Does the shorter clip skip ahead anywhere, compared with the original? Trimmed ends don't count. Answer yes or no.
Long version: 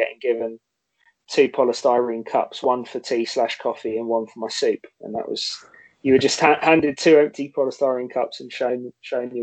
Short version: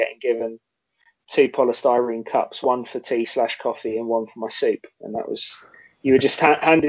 no